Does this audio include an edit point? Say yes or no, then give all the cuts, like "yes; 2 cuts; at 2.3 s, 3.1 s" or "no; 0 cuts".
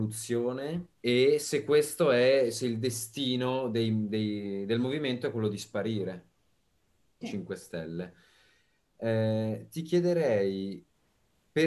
yes; 2 cuts; at 0.9 s, 7.2 s